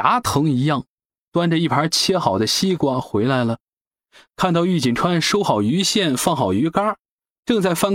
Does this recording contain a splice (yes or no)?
no